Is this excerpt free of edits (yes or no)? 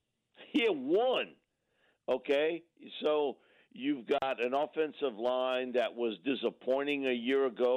yes